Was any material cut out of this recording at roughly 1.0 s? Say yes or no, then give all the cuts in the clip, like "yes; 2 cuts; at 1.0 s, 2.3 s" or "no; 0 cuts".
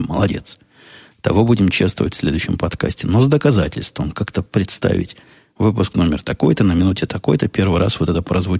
no; 0 cuts